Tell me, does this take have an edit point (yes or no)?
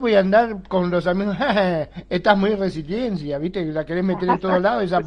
no